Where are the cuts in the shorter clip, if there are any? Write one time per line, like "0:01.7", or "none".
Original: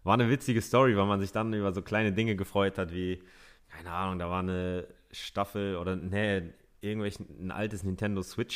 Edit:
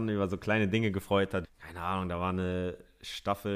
0:01.4